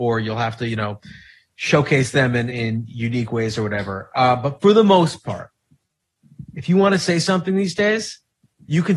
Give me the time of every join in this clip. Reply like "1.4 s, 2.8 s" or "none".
2.5 s